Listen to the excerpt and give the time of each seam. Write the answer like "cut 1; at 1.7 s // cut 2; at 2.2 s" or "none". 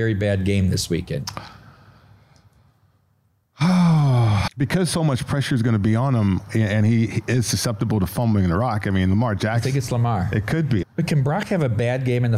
cut 1; at 4.5 s // cut 2; at 10.8 s